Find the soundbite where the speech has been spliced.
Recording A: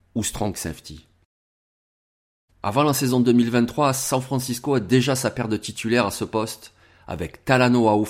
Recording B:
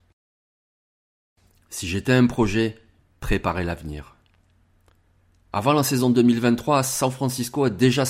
A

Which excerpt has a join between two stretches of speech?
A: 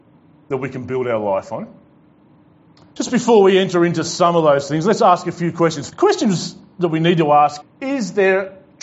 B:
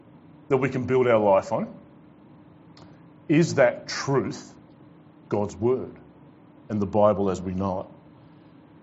A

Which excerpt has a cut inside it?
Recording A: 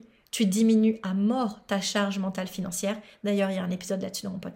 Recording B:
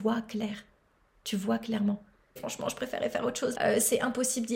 B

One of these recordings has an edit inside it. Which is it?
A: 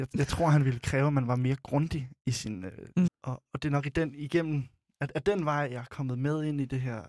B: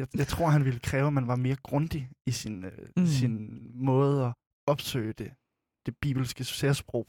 A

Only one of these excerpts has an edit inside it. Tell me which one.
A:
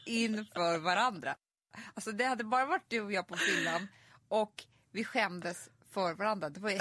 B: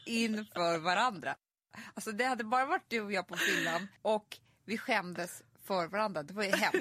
B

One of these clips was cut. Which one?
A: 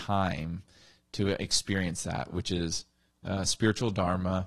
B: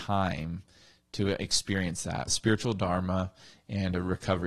B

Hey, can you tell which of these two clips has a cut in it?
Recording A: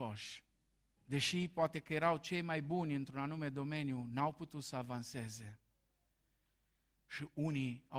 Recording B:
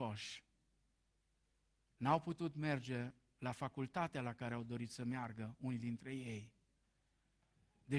A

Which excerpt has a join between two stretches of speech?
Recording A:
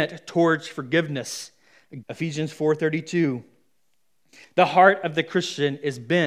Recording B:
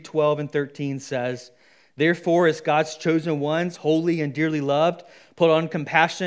A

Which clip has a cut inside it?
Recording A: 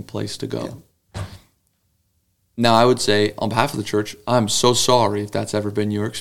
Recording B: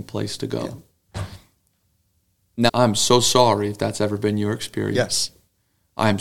B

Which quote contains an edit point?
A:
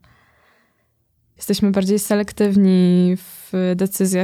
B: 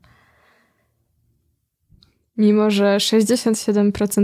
A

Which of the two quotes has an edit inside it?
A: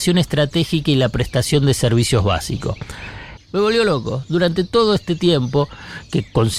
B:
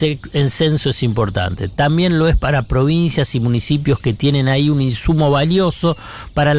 A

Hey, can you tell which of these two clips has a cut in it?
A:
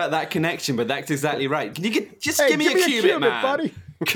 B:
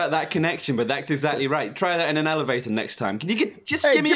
A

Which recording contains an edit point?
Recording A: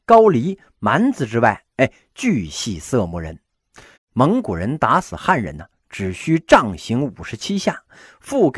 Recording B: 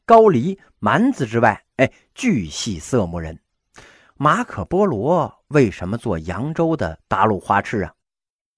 A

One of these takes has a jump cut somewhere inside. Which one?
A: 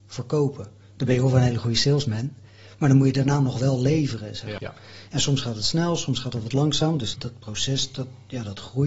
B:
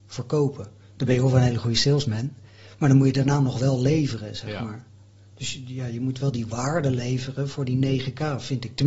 A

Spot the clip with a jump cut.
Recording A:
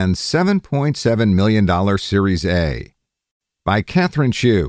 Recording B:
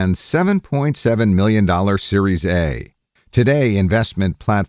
B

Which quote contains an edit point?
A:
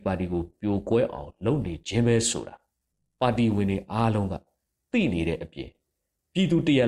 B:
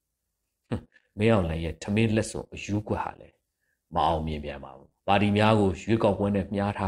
B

